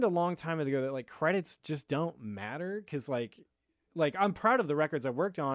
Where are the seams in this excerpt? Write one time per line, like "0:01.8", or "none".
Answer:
0:03.9

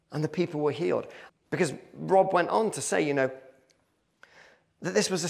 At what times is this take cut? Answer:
0:01.3

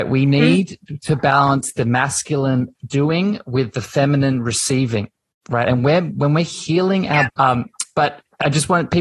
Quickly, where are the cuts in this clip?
0:07.3

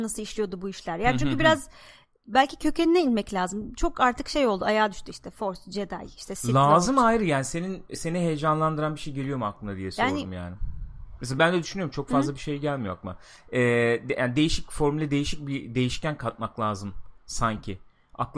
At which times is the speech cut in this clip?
0:11.4

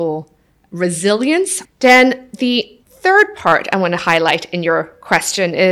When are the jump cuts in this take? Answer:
0:01.6
0:02.8

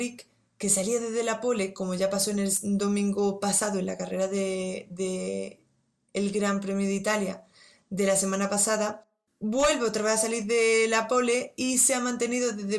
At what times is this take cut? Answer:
none

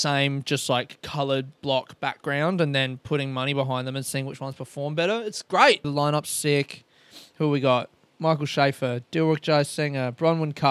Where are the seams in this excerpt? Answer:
0:05.8

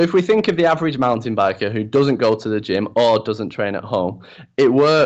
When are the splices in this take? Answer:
none

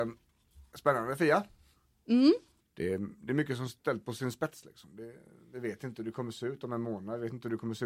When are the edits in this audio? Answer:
0:02.6

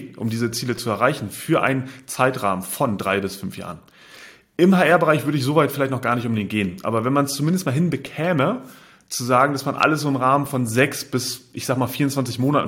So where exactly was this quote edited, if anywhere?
none

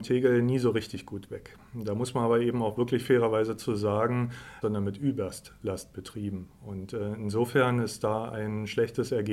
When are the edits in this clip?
0:04.6

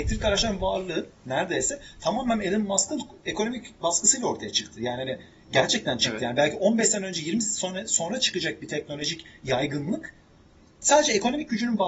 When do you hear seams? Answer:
none

